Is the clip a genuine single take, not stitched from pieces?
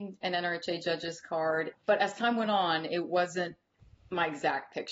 no; 1 cut; at 1.7 s

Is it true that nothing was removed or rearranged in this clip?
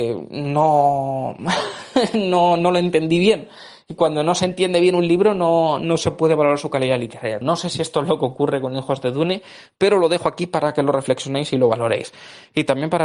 no; 1 cut; at 7.4 s

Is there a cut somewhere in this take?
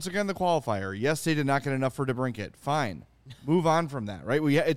no; 0 cuts

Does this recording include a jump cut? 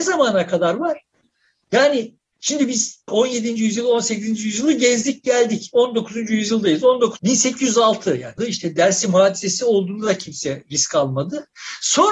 yes; 2 cuts; at 7.2 s, 8.4 s

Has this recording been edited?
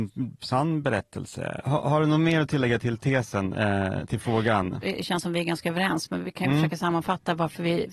no; 0 cuts

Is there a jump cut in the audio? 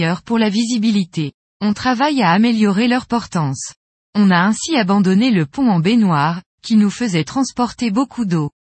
yes; 2 cuts; at 1.5 s, 3.9 s

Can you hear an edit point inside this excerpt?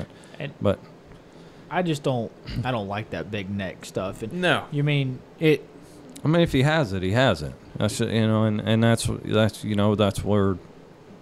no; 0 cuts

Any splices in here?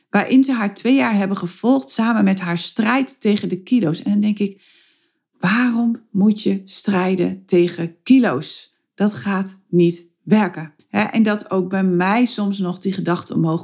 yes; 1 cut; at 10.8 s

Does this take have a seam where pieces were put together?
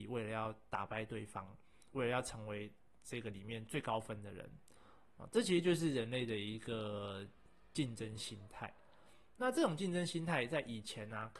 no; 0 cuts

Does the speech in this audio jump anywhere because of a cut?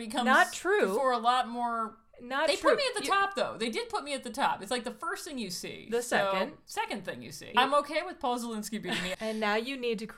yes; 2 cuts; at 7.5 s, 9.1 s

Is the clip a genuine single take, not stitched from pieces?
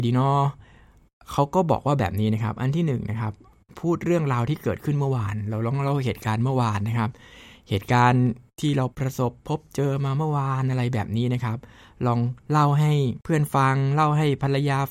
no; 2 cuts; at 8.9 s, 13.2 s

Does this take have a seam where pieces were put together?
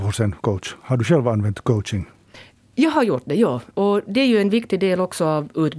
no; 0 cuts

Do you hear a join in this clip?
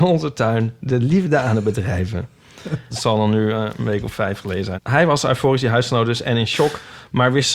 yes; 2 cuts; at 2.9 s, 4.8 s

